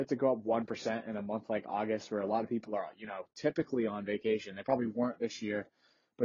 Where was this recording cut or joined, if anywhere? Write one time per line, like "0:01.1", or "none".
none